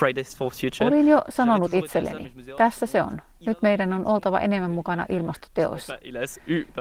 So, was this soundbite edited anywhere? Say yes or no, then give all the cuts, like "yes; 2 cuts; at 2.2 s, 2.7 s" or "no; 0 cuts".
no; 0 cuts